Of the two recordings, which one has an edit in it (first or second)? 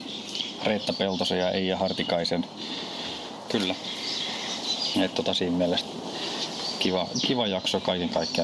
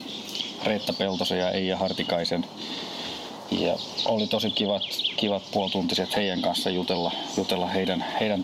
first